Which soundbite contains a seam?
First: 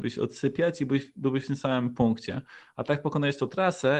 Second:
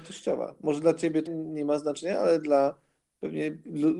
second; 1 cut; at 1.3 s

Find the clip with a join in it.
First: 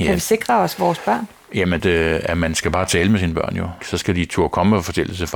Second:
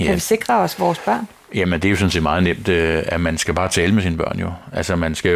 first; 2 cuts; at 1.8 s, 3.8 s

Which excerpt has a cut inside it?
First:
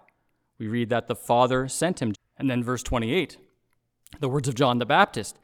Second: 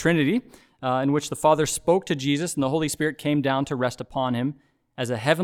first; 1 cut; at 2.1 s

